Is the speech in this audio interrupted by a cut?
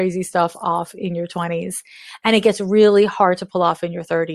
no; 0 cuts

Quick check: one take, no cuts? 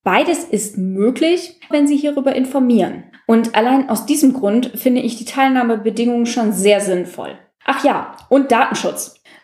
no; 1 cut; at 1.7 s

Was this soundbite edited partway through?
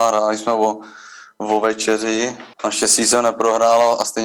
yes; 1 cut; at 2.5 s

